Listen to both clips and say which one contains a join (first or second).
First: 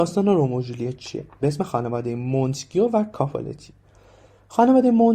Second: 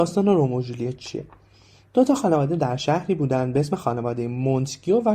first